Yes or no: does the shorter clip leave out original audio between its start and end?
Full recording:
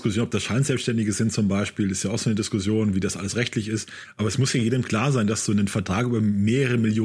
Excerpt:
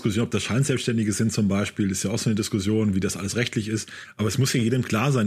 no